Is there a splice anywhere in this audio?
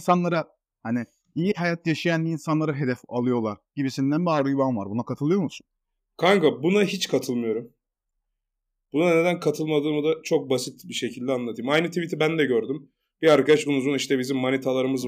yes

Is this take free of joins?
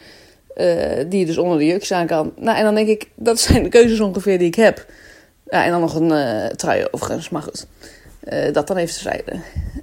yes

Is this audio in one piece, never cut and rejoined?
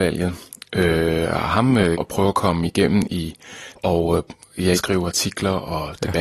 no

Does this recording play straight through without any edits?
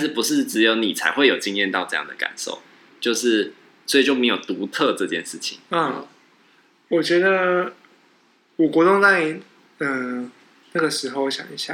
yes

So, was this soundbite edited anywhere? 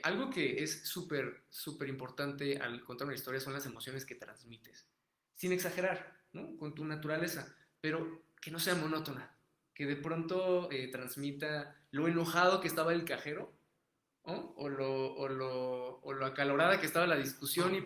no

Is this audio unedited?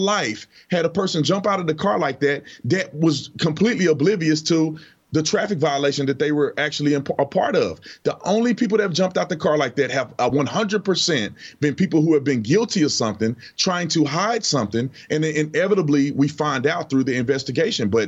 yes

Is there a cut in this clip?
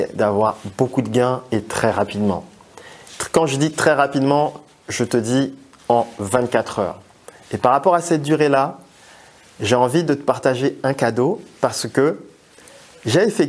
no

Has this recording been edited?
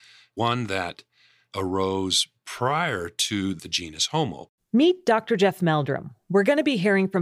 no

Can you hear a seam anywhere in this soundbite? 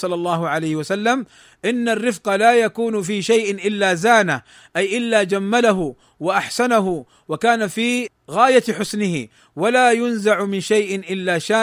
no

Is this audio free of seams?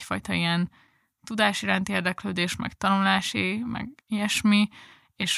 yes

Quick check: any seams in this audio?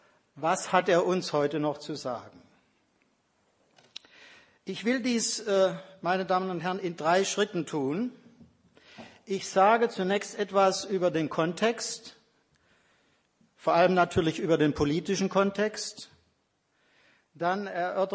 no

